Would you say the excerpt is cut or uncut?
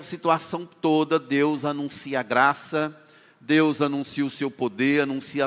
uncut